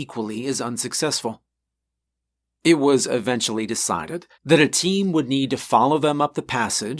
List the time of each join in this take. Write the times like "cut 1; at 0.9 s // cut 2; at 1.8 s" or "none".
cut 1; at 4.3 s